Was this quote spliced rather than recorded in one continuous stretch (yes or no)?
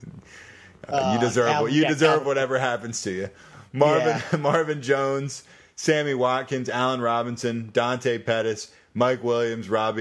no